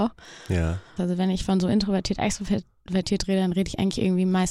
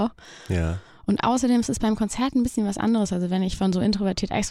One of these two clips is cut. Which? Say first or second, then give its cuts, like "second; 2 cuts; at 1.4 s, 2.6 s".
first; 1 cut; at 1.0 s